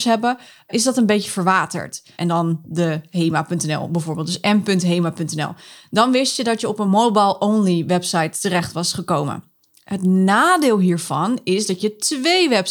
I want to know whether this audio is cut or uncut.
cut